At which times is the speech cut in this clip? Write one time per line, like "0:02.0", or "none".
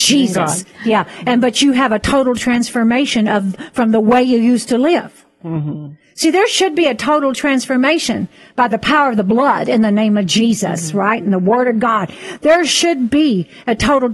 none